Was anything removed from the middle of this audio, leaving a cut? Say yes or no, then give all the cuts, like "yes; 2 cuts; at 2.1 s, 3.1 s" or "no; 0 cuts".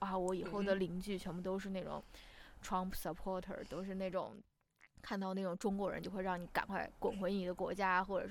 no; 0 cuts